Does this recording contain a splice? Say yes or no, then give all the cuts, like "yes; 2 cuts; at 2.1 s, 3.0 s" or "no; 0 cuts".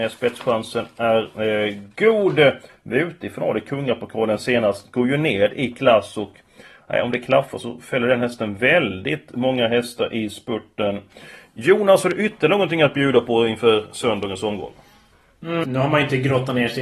yes; 2 cuts; at 2.7 s, 15.6 s